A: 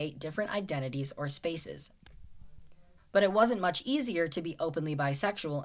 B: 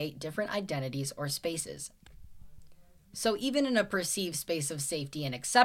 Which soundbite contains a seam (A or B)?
A